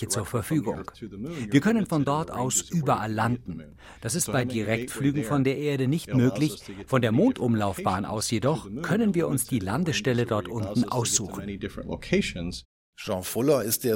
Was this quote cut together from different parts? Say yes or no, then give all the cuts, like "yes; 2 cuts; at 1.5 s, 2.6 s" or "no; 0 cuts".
no; 0 cuts